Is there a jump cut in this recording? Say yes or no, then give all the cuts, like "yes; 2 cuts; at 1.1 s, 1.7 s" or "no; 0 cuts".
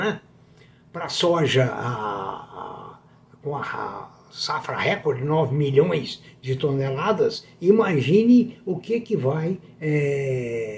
no; 0 cuts